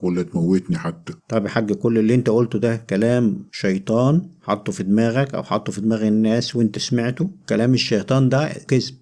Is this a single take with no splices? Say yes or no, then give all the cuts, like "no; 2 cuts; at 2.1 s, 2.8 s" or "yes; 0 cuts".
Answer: no; 1 cut; at 1.2 s